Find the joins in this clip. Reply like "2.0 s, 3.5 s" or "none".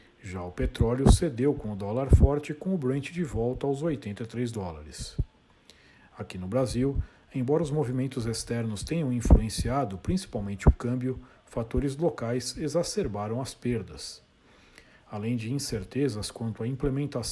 none